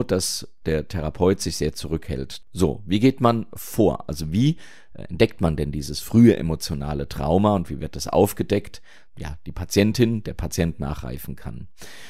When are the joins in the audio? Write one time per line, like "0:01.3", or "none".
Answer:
0:02.4
0:09.1